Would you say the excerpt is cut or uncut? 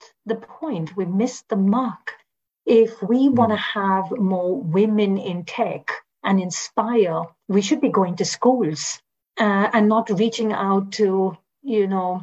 uncut